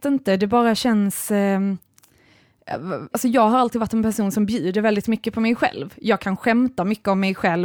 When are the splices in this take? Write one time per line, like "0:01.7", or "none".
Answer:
0:03.1